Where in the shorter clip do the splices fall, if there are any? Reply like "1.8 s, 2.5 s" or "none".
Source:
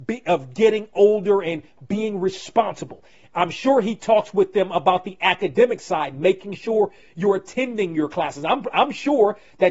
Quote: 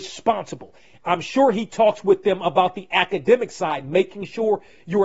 none